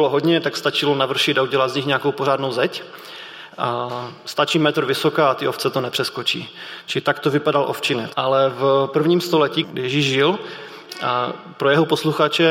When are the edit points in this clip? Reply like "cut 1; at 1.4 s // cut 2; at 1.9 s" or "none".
cut 1; at 8.1 s // cut 2; at 9.6 s

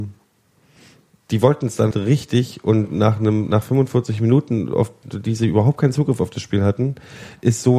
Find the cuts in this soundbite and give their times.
cut 1; at 1.9 s

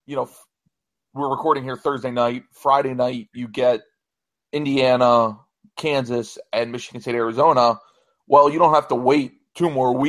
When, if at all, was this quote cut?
none

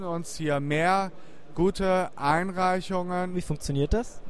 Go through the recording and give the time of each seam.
cut 1; at 3.3 s

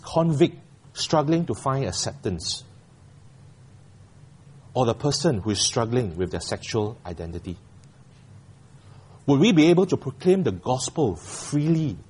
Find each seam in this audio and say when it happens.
none

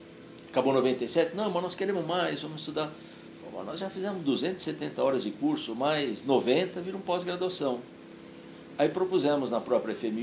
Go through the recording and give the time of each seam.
cut 1; at 6.7 s

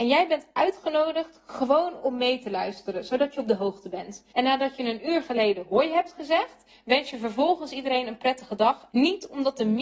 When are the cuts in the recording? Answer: cut 1; at 4.3 s // cut 2; at 8.9 s

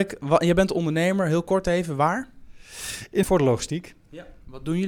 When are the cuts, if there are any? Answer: cut 1; at 3.2 s

